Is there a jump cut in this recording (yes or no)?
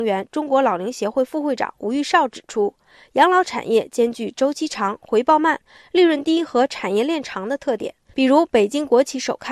yes